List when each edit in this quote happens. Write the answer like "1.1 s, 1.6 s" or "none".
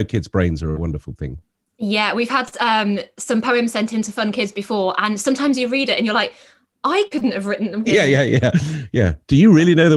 7.8 s